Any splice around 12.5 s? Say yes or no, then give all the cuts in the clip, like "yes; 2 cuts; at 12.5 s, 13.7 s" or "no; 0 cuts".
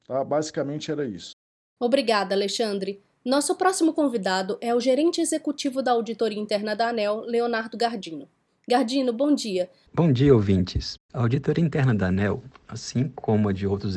no; 1 cut; at 9.9 s